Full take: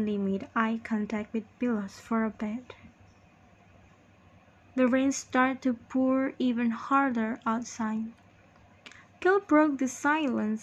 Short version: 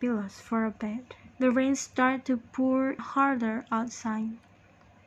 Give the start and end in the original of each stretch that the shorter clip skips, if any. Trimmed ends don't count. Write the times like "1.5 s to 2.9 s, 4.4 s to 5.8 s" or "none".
2.9 s to 4.7 s, 6.4 s to 6.7 s